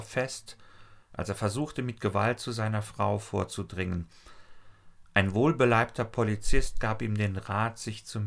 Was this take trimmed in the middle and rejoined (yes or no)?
no